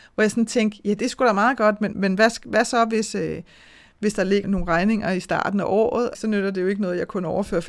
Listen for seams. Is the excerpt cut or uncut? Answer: cut